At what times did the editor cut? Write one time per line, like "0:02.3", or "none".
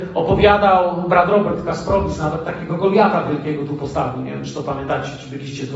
none